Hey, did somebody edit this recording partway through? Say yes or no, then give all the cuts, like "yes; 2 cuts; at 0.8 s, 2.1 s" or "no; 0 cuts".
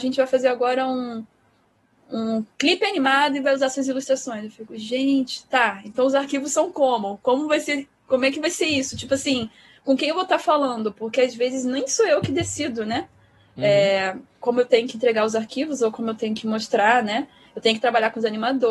no; 0 cuts